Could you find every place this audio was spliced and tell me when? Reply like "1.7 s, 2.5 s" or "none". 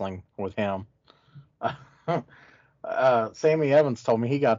none